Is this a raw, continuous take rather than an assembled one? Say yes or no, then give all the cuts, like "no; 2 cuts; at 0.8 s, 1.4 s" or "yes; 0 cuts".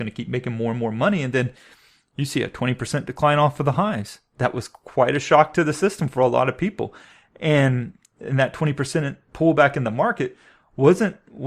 yes; 0 cuts